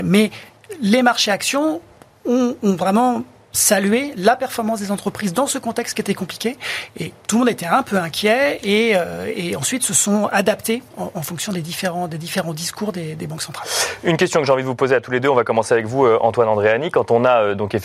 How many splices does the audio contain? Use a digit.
0